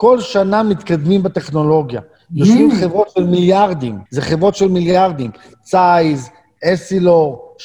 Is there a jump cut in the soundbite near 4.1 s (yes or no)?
yes